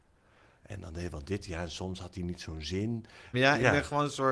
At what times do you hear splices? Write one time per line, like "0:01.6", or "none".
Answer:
0:03.3